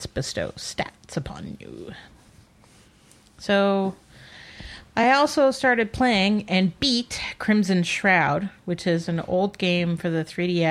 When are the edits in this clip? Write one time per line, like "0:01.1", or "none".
none